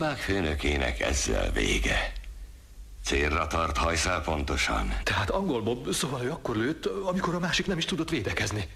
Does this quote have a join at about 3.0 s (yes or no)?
yes